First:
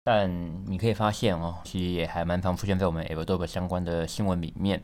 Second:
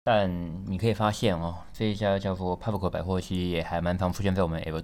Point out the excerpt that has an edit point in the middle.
first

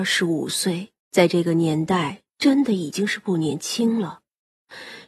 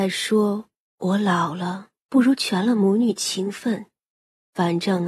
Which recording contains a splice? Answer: first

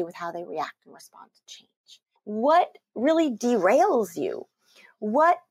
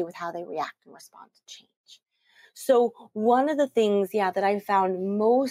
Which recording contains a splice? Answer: first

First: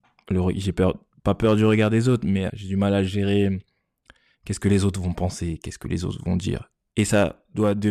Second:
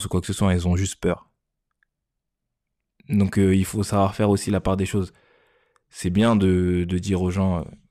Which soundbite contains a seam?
first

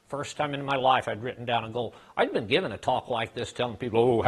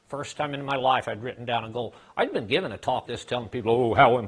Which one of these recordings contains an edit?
second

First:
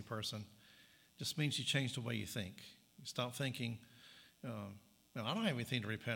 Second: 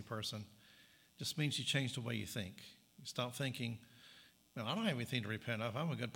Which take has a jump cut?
second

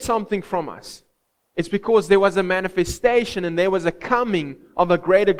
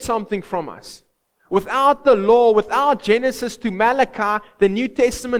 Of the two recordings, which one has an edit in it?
second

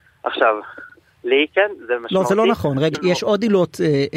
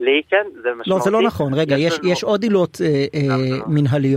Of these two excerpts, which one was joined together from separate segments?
first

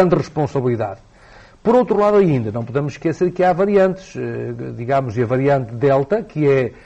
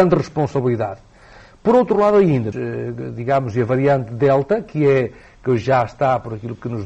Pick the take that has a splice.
second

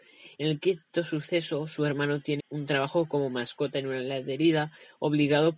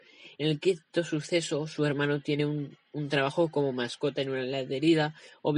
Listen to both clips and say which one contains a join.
first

